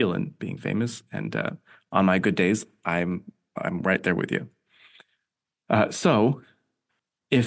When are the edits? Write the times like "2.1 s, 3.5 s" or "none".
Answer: none